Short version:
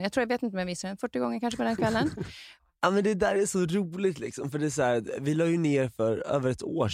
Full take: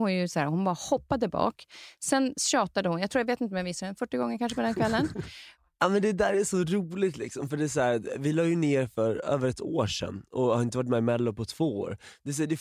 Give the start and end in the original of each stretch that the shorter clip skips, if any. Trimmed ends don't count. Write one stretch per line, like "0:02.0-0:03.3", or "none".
none